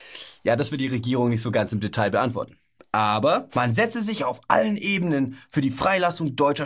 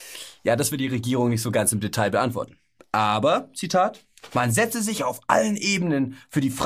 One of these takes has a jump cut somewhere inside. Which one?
first; 1 cut; at 3.5 s

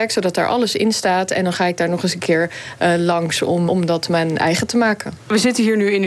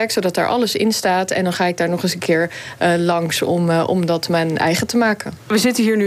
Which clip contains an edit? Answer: first; 1 cut; at 3.7 s

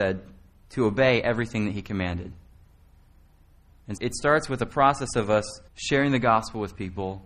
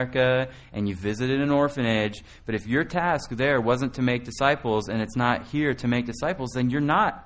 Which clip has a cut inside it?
first; 2 cuts; at 4.0 s, 5.7 s

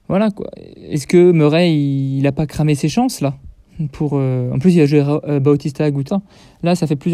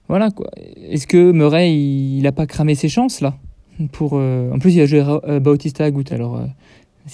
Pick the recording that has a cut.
first; 1 cut; at 6.1 s

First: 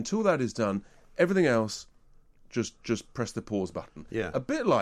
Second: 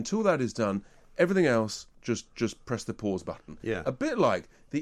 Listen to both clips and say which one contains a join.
second; 1 cut; at 1.9 s

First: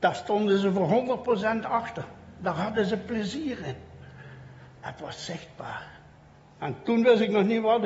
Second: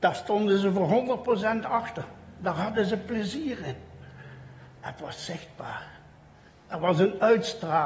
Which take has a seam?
first; 1 cut; at 6.4 s

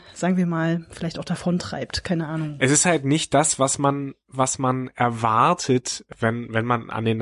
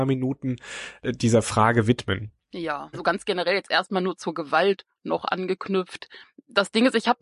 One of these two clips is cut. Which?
second; 2 cuts; at 2.9 s, 5.0 s

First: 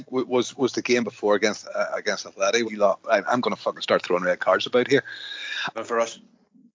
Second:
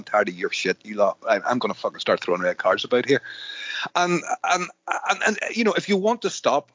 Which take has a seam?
first; 2 cuts; at 2.6 s, 5.7 s

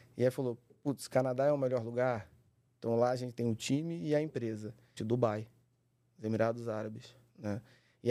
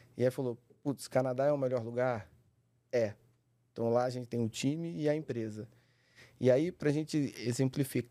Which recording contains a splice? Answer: first; 2 cuts; at 2.7 s, 5.0 s

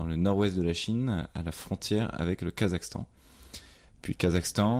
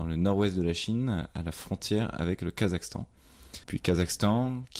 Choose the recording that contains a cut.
second; 1 cut; at 3.6 s

